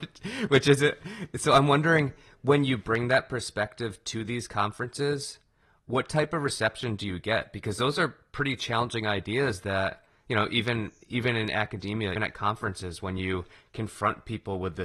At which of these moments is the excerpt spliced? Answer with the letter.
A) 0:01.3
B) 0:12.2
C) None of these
B